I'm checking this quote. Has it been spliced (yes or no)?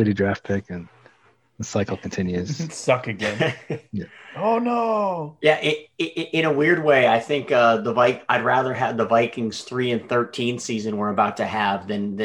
no